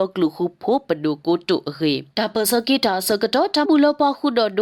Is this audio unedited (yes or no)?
no